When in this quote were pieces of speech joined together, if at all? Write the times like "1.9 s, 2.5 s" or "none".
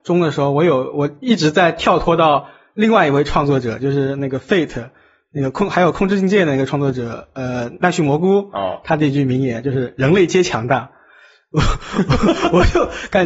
none